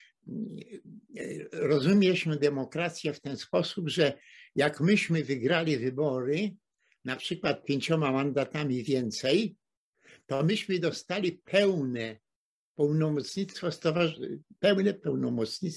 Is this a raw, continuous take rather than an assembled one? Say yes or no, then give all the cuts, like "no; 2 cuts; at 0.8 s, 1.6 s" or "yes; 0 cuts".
yes; 0 cuts